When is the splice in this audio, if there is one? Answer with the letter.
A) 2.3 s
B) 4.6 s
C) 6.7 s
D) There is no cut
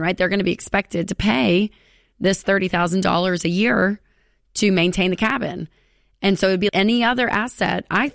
C